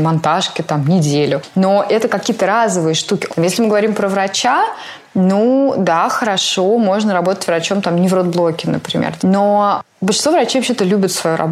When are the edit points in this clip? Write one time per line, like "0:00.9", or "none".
0:03.3
0:09.2